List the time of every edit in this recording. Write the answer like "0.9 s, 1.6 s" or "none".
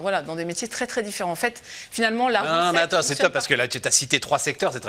none